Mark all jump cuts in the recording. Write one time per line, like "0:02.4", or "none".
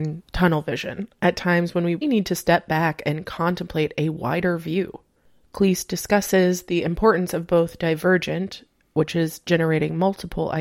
0:02.0